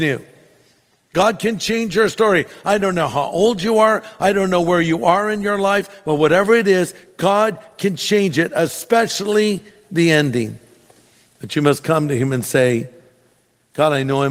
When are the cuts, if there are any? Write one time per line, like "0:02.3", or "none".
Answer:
none